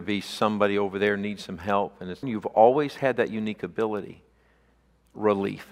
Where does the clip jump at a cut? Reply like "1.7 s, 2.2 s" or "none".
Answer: 2.2 s